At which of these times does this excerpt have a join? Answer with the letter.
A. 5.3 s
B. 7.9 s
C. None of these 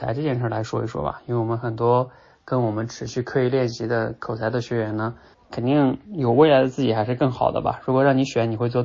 A